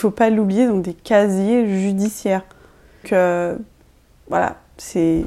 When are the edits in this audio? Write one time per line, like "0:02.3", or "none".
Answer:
0:03.0